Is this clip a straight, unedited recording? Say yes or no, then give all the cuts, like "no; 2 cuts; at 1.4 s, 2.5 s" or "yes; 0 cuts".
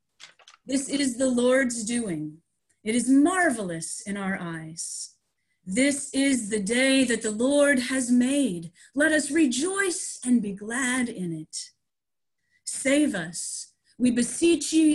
yes; 0 cuts